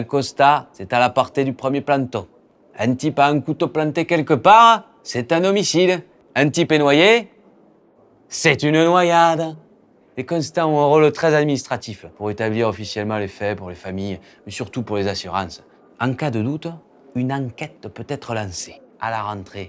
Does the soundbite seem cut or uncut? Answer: cut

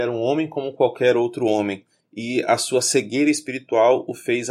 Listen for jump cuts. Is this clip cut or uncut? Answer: cut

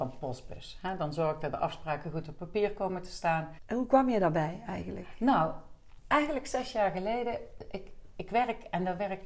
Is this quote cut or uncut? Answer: cut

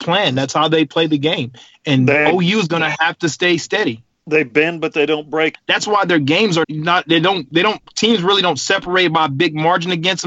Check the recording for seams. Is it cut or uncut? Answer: cut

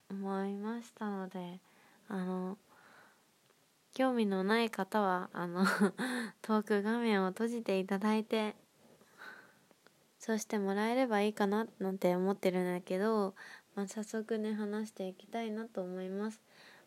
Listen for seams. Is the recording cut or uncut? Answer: uncut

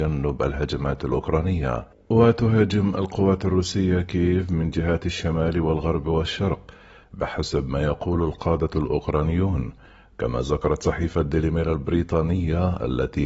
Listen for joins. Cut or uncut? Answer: uncut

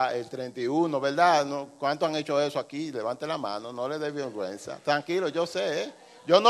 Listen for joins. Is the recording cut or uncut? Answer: uncut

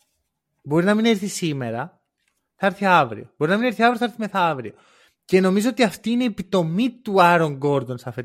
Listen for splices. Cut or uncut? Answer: uncut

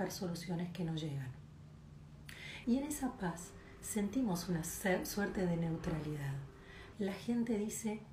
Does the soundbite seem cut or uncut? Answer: cut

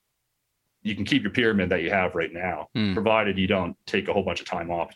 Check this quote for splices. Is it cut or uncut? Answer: uncut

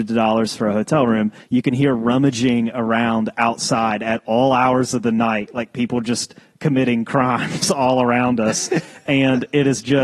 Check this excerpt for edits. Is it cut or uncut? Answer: cut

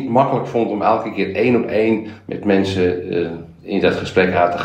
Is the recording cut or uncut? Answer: uncut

